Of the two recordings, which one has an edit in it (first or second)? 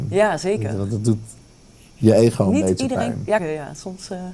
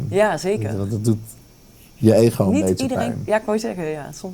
first